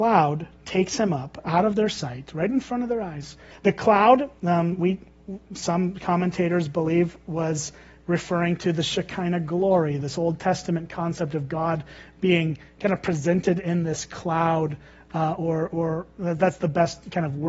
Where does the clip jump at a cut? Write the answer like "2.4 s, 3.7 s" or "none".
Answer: 3.5 s